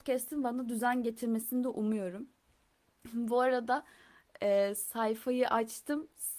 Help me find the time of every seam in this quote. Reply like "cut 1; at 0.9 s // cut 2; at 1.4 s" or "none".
none